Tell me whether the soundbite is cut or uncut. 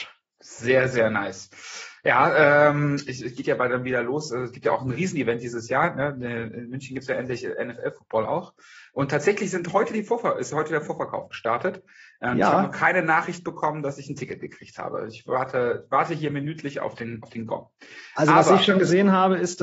uncut